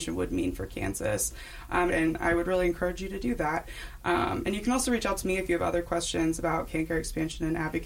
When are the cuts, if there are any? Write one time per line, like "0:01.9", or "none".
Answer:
0:01.9